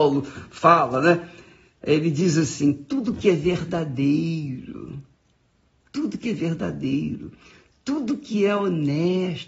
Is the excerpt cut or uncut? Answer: uncut